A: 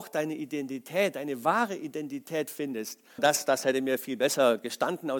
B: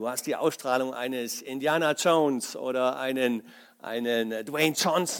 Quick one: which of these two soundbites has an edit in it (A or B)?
A